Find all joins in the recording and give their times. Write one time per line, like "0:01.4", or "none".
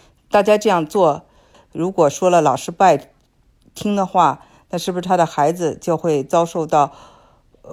0:01.5

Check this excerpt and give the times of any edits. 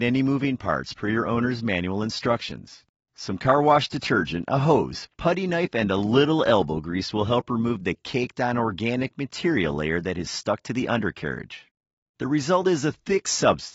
0:03.1
0:12.0

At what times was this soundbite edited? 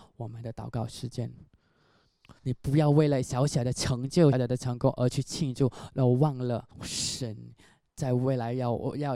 0:02.4
0:04.3
0:06.7

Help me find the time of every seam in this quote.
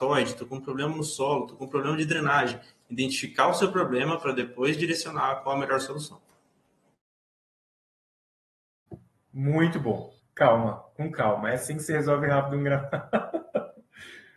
0:10.2

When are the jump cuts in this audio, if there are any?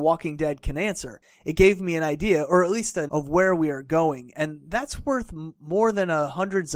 0:03.1

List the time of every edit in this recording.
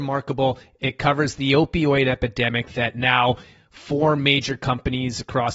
none

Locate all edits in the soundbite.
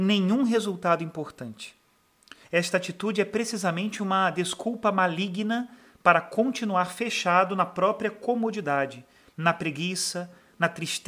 0:02.4

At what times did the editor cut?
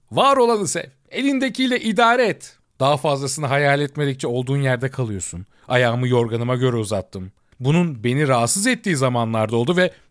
0:02.6
0:05.6

